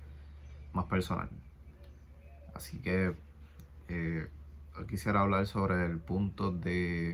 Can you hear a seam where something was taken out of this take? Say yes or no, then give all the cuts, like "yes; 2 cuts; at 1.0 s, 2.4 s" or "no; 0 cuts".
no; 0 cuts